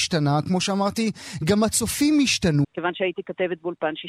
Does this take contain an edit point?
yes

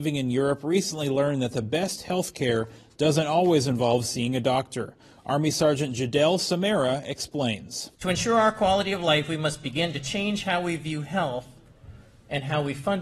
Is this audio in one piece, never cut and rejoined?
no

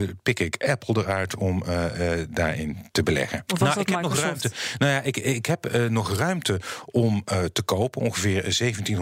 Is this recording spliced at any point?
yes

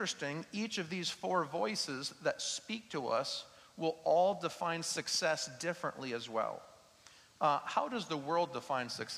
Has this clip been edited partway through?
no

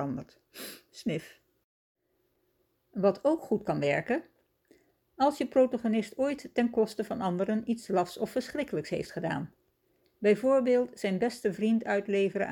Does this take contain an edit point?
no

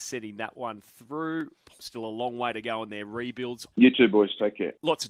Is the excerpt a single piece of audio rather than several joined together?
no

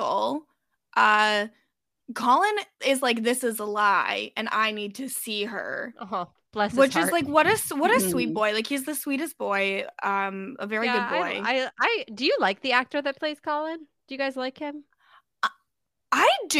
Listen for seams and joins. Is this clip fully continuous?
yes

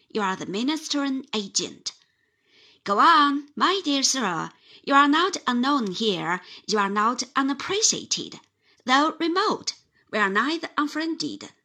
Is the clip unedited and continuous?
yes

